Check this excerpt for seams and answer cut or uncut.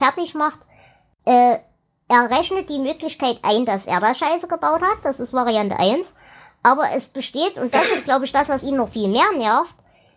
uncut